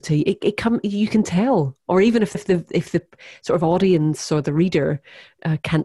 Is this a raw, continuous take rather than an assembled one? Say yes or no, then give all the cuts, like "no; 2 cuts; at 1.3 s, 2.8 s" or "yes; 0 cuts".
no; 1 cut; at 2.3 s